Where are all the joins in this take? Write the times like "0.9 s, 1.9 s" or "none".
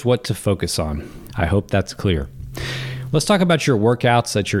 1.3 s, 3.1 s